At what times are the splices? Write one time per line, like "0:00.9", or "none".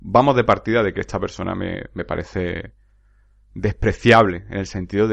none